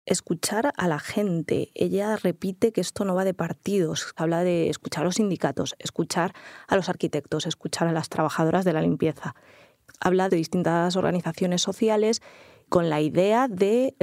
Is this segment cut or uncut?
uncut